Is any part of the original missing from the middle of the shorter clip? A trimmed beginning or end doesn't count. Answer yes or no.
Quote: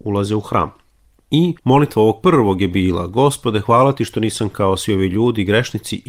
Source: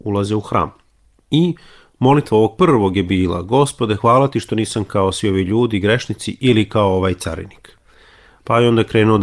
yes